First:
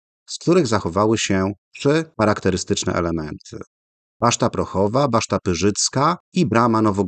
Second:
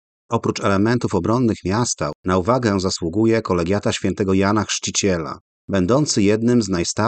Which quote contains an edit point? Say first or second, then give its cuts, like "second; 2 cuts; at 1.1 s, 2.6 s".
second; 1 cut; at 5.6 s